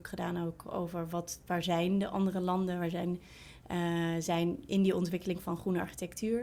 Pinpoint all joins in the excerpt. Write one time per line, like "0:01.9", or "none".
none